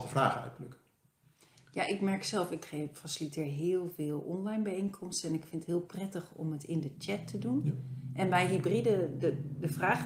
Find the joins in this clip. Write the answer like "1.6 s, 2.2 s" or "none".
none